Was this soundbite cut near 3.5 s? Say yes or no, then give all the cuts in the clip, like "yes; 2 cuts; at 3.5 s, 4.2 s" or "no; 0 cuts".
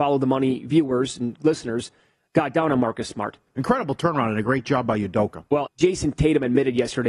yes; 2 cuts; at 3.5 s, 5.7 s